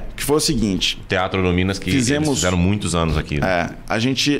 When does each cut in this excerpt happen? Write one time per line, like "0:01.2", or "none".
none

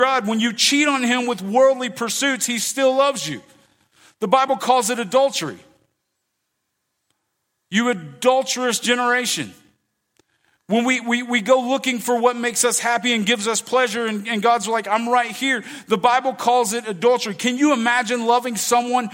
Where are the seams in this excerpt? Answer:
none

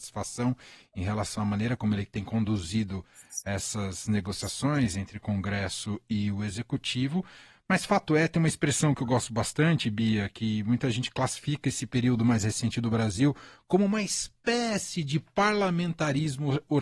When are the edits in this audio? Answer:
none

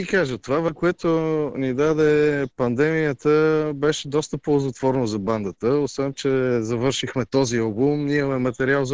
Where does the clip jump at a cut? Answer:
none

